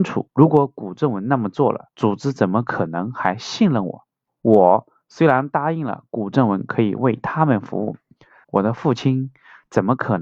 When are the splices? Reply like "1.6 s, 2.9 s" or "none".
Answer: 4.3 s, 8.4 s